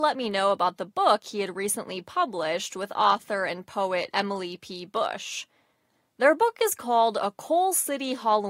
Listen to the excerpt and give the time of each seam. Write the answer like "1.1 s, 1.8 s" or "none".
none